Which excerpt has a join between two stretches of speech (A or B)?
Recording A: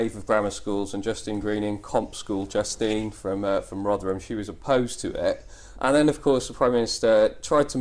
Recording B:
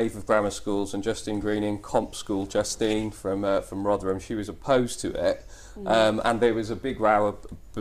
A